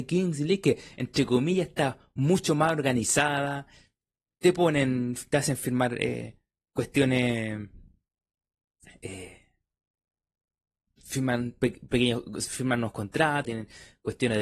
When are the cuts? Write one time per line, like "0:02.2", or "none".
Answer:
0:13.4